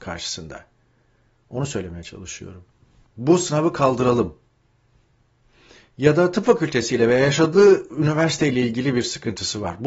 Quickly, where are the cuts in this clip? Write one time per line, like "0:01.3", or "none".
0:03.1